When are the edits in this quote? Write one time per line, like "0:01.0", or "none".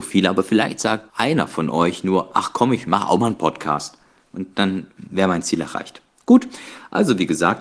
none